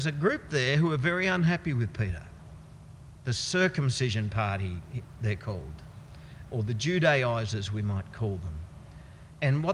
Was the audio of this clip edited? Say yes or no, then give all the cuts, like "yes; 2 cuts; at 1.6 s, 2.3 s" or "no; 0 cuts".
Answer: yes; 1 cut; at 6.5 s